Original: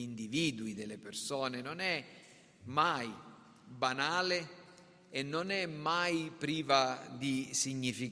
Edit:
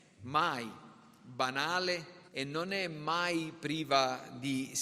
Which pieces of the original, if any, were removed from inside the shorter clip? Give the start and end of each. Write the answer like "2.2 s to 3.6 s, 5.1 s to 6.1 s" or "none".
4.7 s to 5.1 s